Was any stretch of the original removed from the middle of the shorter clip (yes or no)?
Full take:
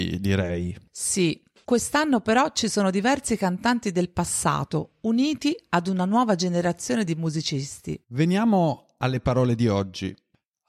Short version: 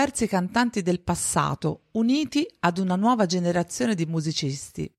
no